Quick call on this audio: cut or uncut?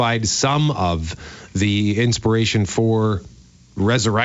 uncut